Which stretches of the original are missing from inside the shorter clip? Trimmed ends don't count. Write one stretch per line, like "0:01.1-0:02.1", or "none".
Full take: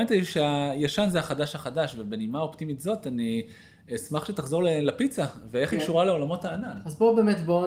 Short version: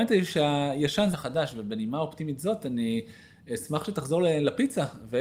0:01.1-0:01.5